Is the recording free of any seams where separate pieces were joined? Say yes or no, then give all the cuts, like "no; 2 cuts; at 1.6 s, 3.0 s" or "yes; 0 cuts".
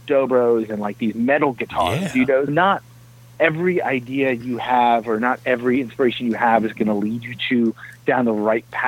no; 1 cut; at 2.5 s